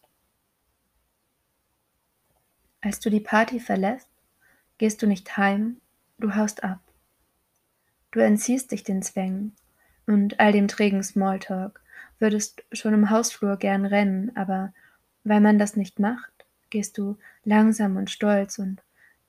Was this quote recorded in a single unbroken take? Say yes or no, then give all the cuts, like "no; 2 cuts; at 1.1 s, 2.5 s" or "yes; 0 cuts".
yes; 0 cuts